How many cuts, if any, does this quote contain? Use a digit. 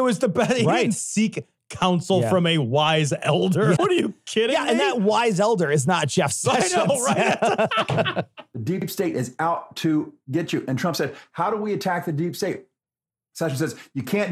1